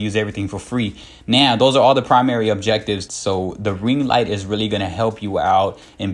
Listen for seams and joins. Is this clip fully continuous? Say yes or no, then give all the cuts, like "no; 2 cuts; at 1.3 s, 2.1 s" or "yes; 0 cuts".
no; 1 cut; at 3.1 s